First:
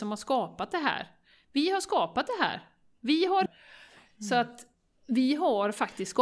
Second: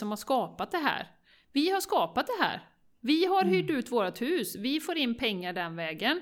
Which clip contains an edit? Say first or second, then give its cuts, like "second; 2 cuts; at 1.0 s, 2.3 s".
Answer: first; 1 cut; at 3.5 s